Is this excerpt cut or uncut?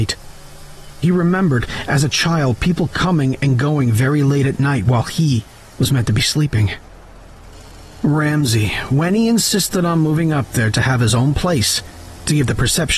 uncut